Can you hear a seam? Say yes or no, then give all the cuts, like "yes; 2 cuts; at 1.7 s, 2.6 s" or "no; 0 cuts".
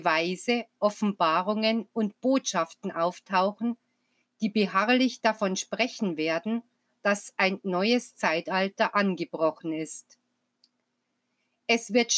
no; 0 cuts